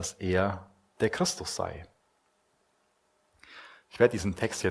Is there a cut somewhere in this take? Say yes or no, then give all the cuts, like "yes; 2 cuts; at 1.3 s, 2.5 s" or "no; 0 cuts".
no; 0 cuts